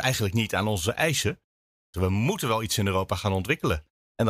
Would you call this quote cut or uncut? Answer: cut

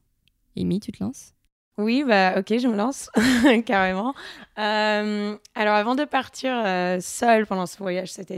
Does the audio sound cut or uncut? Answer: uncut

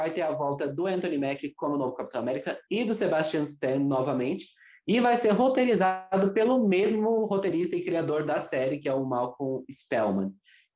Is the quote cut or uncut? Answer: uncut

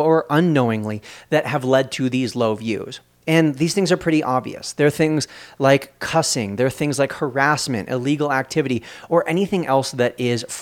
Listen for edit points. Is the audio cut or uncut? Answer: uncut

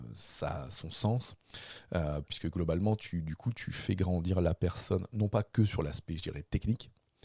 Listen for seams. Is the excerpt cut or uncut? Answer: cut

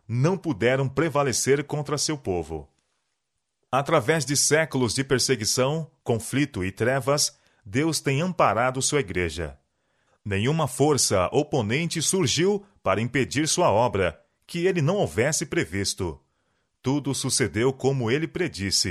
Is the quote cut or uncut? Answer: cut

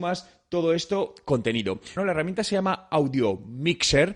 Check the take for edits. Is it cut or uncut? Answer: cut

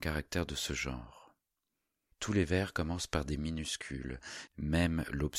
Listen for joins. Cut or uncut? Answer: cut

